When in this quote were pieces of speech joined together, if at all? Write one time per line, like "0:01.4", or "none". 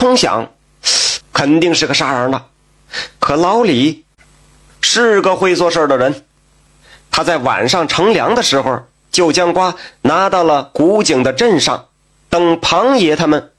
0:01.2